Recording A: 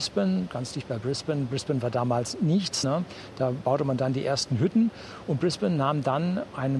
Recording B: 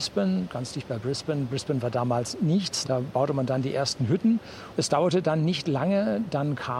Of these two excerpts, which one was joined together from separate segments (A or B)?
B